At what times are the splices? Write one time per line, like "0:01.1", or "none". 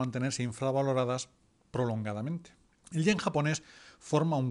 0:02.8

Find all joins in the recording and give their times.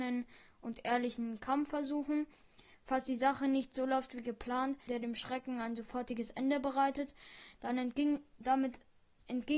0:04.9
0:08.4

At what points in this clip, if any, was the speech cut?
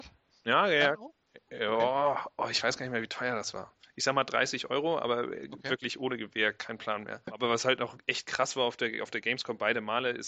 none

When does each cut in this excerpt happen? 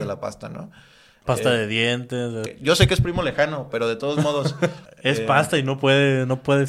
0:02.5
0:04.9

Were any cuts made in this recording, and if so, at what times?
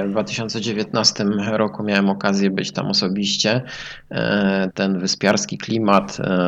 0:04.7

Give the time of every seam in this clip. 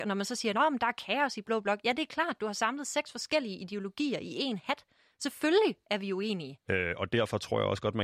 0:06.7

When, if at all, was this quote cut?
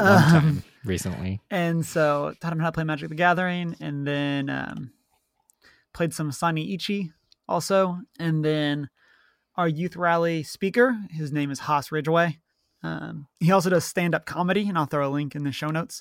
0:08.1
0:13.3

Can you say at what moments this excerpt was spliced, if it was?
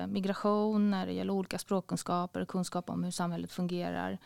none

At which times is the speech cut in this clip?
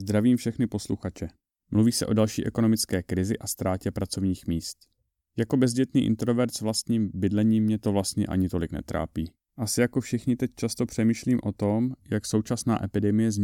0:01.6
0:09.5

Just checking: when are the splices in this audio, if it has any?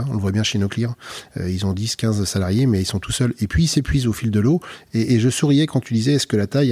0:04.9

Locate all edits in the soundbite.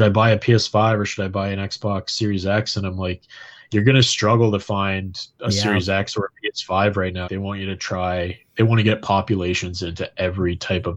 0:07.2

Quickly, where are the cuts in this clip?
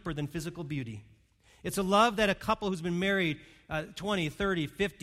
none

